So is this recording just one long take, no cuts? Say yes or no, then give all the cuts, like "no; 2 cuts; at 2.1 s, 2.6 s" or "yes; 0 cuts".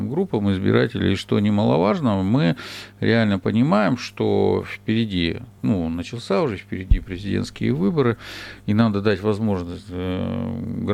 yes; 0 cuts